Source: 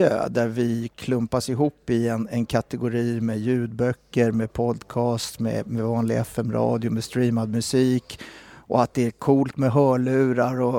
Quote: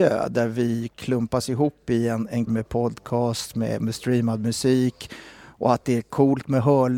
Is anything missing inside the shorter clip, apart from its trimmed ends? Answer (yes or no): yes